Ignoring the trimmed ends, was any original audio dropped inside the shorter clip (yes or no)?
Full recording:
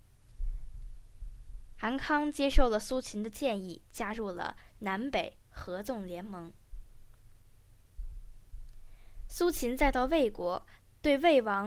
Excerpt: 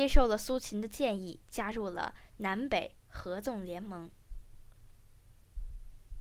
no